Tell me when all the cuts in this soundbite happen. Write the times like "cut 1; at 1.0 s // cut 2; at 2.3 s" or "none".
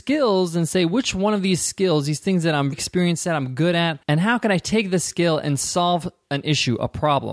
cut 1; at 2.7 s // cut 2; at 4.0 s